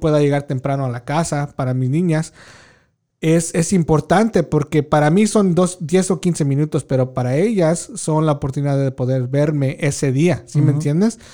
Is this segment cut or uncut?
uncut